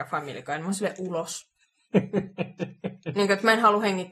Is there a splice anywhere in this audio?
no; 0 cuts

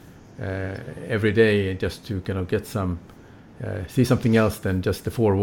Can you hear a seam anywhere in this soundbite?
no; 0 cuts

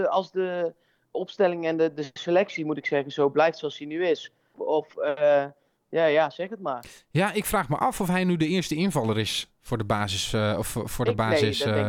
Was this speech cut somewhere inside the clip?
yes; 1 cut; at 4.5 s

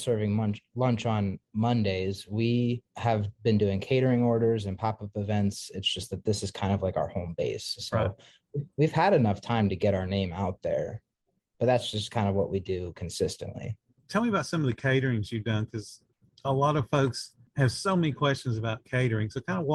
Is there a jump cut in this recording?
no; 0 cuts

